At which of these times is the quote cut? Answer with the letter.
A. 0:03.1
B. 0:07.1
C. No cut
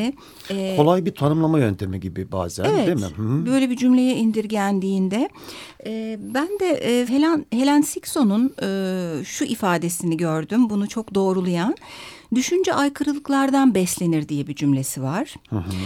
B